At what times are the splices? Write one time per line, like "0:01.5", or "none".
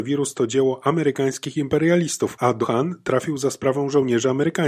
0:02.6